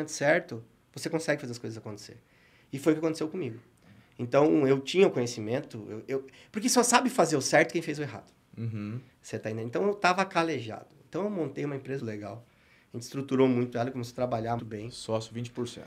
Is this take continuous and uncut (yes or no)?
no